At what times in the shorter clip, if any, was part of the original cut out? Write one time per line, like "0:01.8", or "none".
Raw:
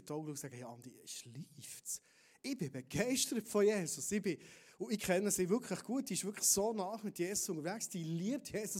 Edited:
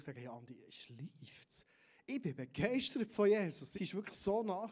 0:03.7